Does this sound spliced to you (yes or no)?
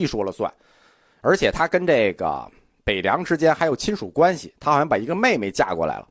no